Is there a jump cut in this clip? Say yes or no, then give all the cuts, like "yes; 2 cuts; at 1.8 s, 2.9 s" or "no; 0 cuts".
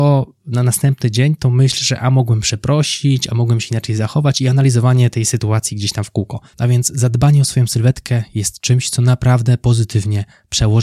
yes; 1 cut; at 6.5 s